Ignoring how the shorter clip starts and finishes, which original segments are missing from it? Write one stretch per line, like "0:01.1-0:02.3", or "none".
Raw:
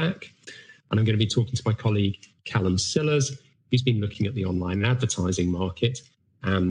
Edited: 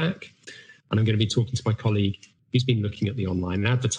0:02.4-0:03.6